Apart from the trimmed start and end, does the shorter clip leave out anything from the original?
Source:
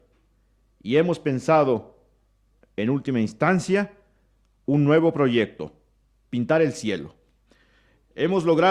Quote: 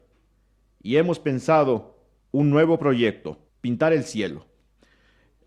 yes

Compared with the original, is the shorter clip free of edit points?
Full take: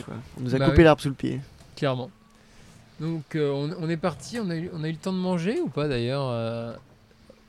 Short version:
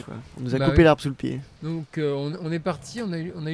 no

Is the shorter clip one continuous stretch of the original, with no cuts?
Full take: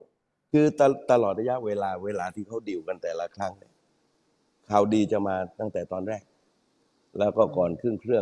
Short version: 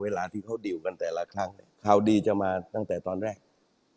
no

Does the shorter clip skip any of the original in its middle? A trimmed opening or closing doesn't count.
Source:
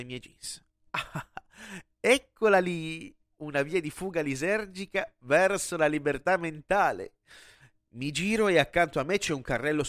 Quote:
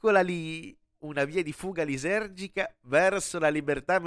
no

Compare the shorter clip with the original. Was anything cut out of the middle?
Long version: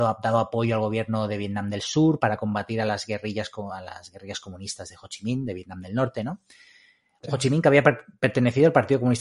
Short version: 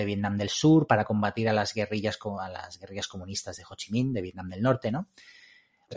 no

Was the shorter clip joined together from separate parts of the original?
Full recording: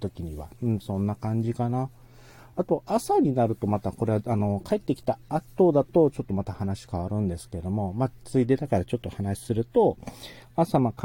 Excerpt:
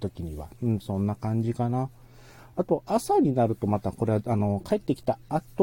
no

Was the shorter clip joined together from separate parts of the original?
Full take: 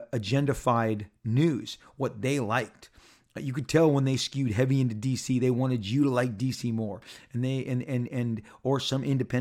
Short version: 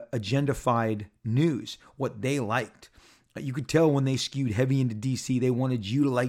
no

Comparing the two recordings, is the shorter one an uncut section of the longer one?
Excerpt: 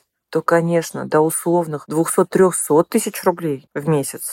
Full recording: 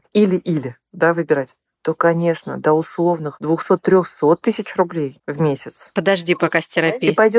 yes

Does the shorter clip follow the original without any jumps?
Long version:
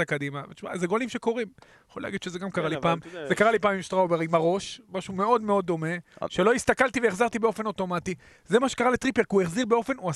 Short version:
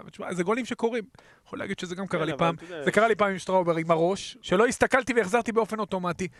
no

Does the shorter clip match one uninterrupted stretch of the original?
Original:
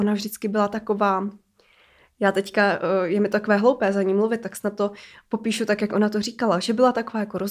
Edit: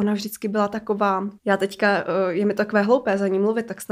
no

